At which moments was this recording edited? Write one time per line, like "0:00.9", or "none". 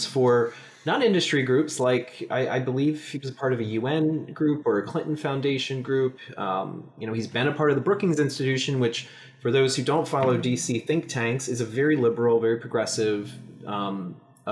none